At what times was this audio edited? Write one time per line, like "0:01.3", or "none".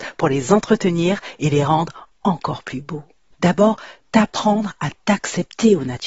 0:03.3